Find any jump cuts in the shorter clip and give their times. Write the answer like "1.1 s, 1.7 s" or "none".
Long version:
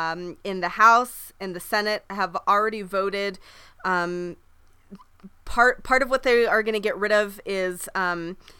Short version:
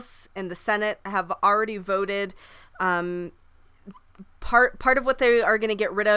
none